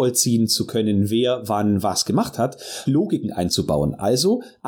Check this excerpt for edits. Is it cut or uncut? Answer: cut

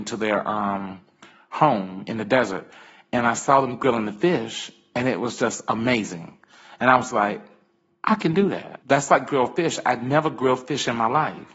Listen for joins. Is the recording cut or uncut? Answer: cut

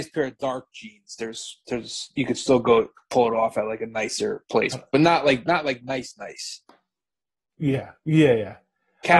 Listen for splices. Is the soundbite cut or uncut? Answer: uncut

